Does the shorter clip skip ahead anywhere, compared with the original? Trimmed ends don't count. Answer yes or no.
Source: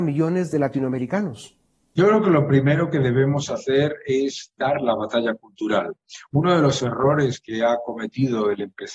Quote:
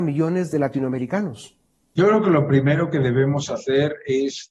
no